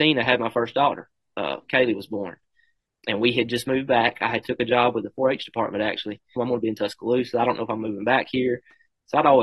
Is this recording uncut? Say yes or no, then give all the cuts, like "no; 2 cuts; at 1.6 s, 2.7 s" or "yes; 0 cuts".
no; 1 cut; at 6.4 s